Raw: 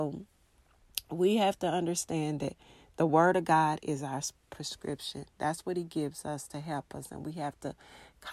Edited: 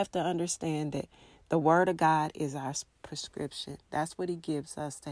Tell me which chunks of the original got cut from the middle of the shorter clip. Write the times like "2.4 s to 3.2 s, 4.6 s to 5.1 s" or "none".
none